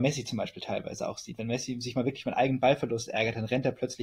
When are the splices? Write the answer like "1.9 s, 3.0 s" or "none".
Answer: none